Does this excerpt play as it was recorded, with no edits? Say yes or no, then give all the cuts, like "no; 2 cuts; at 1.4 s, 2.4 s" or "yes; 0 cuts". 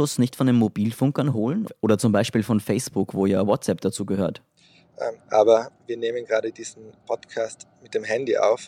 no; 1 cut; at 5.2 s